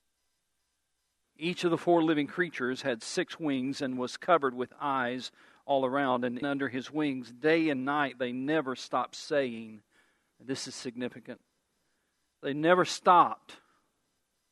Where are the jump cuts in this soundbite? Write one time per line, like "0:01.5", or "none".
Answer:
0:01.2
0:06.4